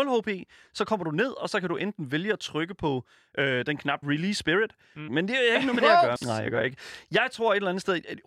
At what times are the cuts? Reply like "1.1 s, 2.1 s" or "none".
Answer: 4.0 s, 5.1 s, 6.2 s